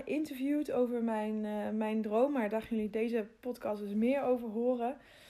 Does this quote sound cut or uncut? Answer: uncut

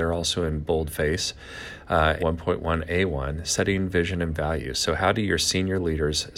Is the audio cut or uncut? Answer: cut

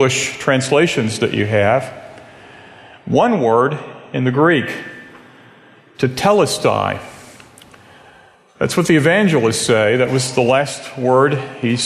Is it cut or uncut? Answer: uncut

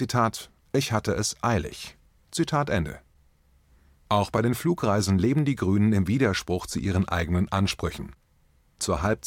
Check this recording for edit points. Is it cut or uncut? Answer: uncut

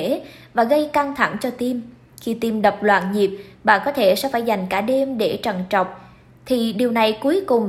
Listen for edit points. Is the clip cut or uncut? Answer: uncut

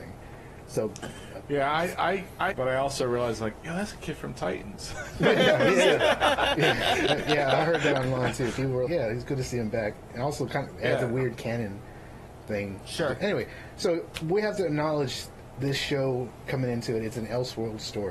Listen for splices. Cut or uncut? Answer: cut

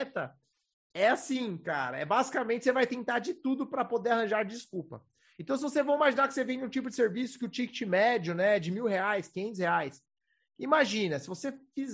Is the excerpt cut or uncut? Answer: uncut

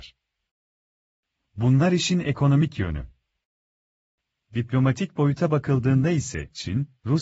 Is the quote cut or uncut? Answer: uncut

